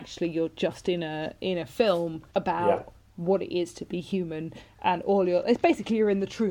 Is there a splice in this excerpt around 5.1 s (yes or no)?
no